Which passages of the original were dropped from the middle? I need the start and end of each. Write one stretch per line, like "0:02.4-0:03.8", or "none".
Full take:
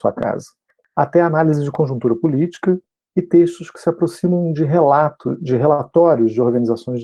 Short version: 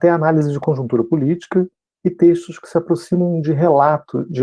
none